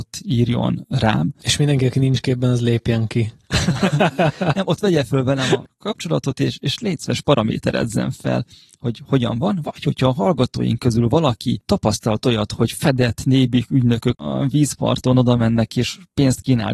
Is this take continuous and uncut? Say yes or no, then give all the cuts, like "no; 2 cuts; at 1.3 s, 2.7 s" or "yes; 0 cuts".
yes; 0 cuts